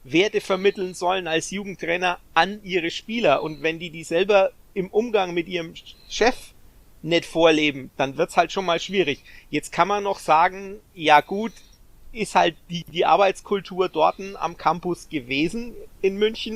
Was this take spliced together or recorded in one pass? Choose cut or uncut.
uncut